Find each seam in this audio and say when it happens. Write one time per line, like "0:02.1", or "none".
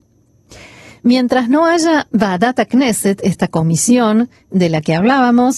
none